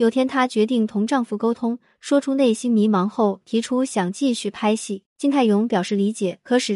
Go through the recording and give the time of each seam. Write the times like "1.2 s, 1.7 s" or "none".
5.1 s